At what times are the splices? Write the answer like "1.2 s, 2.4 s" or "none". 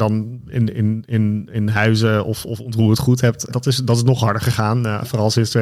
3.5 s